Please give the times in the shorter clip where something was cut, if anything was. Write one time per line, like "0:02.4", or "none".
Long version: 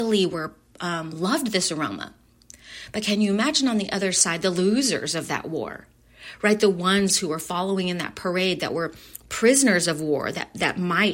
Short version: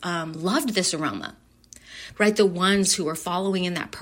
0:02.1